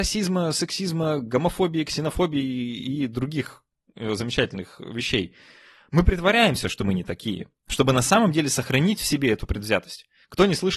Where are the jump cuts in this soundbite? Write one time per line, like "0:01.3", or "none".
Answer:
none